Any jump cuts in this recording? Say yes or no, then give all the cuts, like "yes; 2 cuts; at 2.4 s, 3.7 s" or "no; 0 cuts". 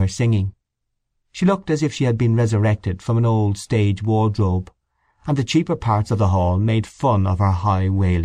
no; 0 cuts